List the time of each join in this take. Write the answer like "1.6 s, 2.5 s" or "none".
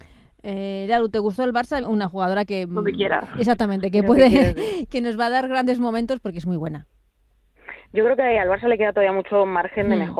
1.8 s